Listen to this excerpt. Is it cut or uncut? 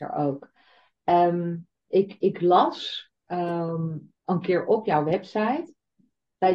cut